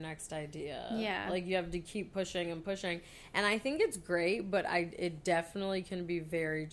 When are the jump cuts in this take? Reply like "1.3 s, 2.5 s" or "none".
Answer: none